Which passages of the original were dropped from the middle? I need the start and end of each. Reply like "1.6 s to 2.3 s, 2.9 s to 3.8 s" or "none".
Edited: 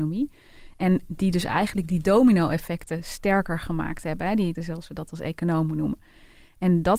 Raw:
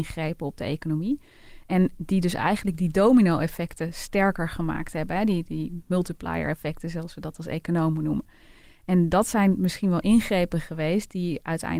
5.4 s to 6.8 s